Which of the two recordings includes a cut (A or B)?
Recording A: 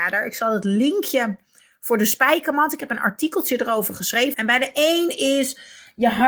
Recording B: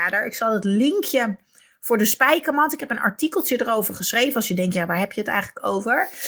A